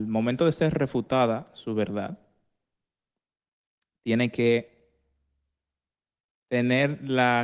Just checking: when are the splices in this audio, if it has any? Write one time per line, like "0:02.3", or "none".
none